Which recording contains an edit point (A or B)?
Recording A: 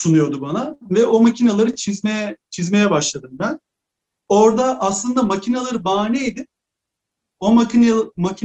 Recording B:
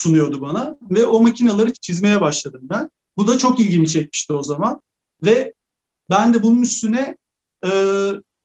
B